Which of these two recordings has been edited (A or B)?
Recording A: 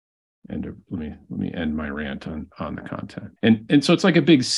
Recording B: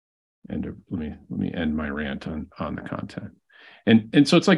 A